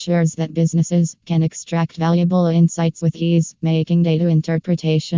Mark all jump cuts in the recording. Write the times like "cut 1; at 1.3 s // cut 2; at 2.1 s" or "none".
cut 1; at 1.2 s